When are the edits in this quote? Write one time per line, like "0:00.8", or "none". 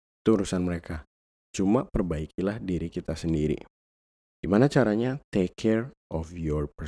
none